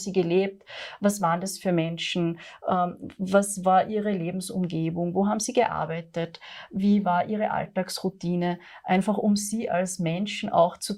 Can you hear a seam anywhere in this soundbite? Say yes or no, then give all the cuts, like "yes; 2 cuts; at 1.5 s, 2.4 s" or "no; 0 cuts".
no; 0 cuts